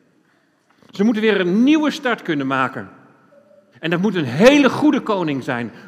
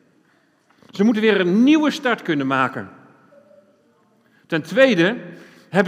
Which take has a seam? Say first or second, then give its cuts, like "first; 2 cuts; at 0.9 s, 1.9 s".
first; 1 cut; at 3.7 s